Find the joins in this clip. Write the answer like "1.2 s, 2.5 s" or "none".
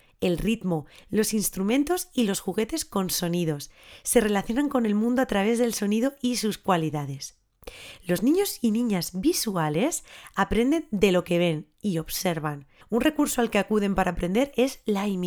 1.0 s, 12.8 s